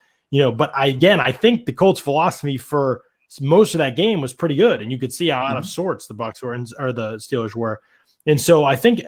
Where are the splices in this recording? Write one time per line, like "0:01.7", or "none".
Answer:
none